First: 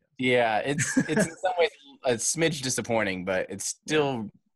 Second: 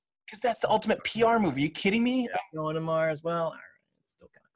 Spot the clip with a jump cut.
second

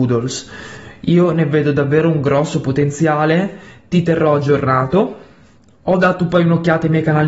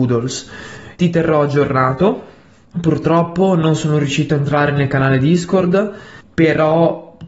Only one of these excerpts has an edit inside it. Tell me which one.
second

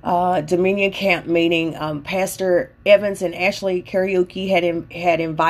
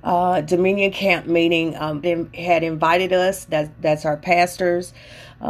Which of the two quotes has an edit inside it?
second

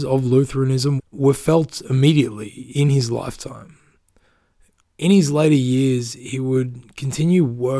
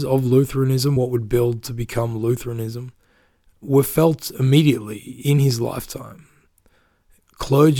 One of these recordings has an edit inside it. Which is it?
first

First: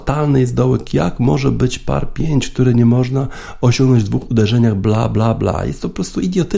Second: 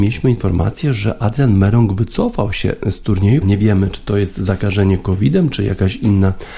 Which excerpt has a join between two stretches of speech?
second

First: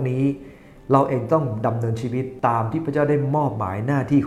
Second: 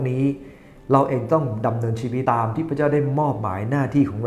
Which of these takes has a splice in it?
second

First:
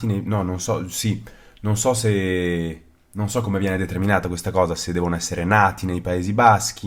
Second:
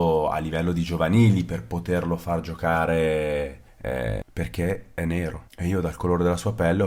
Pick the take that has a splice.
second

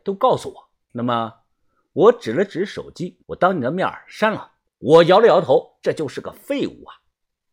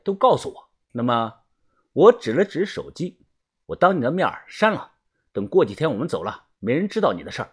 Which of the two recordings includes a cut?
first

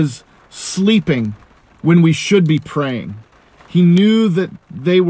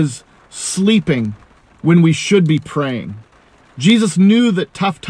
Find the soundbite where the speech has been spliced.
first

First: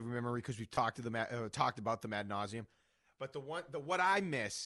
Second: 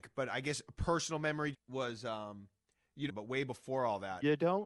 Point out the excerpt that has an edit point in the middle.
second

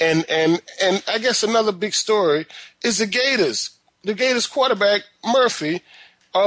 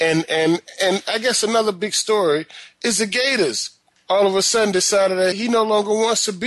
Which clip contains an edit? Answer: second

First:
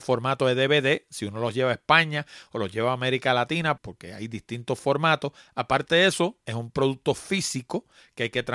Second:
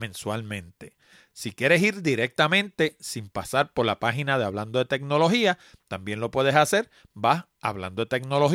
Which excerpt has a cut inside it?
first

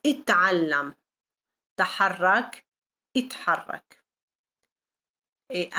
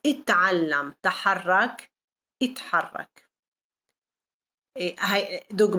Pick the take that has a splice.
second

